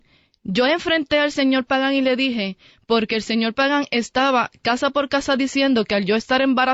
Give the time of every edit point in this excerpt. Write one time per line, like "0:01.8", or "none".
none